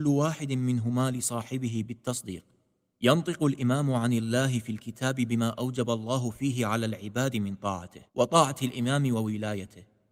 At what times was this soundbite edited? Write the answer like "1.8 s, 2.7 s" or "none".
8.1 s